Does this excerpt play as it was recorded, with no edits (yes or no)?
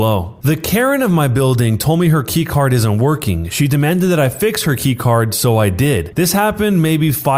yes